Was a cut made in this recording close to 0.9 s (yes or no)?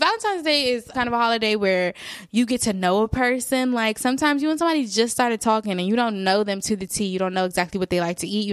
yes